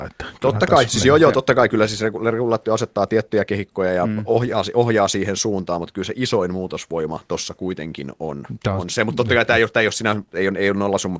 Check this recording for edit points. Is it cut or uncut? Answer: uncut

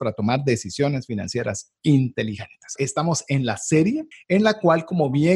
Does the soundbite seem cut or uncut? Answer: cut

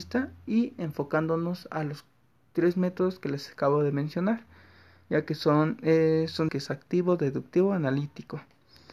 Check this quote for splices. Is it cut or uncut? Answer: cut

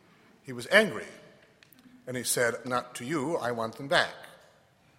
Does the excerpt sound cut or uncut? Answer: cut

